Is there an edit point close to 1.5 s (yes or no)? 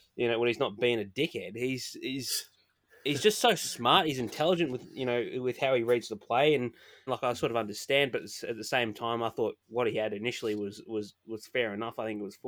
no